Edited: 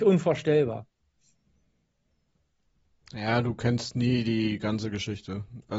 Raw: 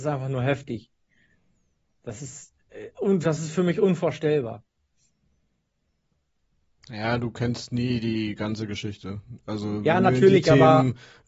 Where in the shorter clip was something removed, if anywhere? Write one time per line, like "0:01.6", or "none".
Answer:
none